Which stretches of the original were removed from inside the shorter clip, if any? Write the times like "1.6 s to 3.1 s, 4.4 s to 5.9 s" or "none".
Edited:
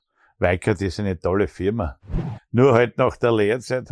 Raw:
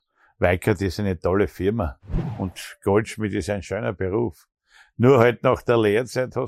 2.4 s to 4.8 s